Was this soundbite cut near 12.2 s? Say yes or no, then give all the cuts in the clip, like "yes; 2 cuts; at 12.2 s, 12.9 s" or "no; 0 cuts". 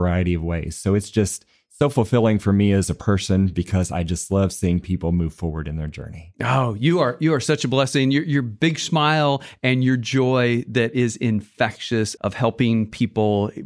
yes; 1 cut; at 12.2 s